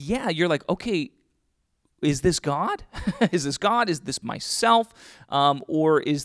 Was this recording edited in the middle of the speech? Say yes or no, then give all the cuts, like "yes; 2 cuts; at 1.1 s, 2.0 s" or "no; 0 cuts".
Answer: no; 0 cuts